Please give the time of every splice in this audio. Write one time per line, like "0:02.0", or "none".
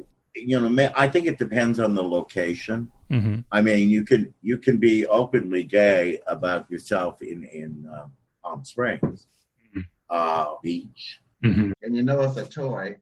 0:10.6
0:11.7